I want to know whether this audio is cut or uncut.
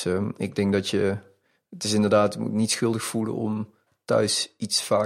uncut